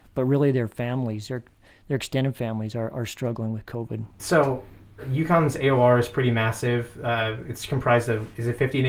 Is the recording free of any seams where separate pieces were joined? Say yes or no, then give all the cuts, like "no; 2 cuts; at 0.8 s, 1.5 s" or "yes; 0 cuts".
no; 1 cut; at 4.2 s